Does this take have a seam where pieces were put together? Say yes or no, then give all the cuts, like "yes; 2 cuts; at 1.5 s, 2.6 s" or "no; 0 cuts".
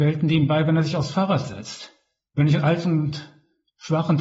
no; 0 cuts